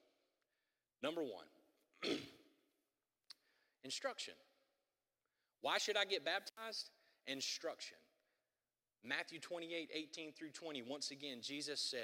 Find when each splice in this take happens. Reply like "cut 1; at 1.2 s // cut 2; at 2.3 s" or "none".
none